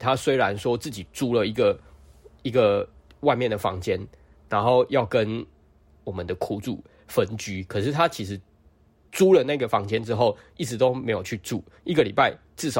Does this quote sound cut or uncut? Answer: uncut